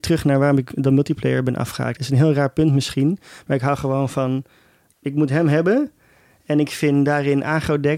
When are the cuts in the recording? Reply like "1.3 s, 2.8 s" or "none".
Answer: 4.9 s

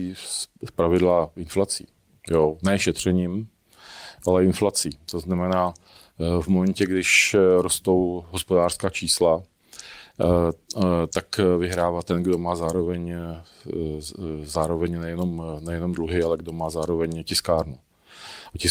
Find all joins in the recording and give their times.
none

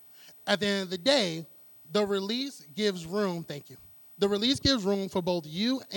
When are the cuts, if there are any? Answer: 4.1 s

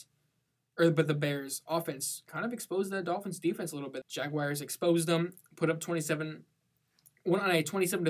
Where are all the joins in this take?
4.0 s

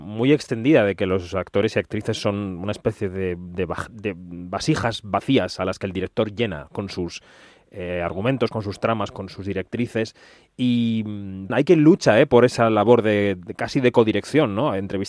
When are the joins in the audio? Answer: 11.5 s

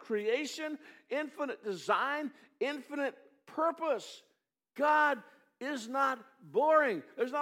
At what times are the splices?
none

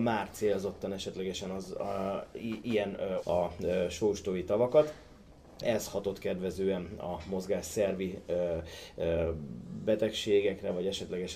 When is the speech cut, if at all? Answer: 3.2 s, 5.6 s

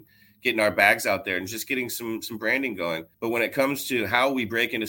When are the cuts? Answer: 3.1 s

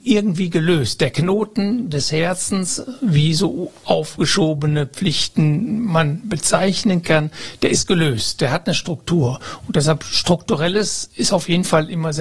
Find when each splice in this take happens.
none

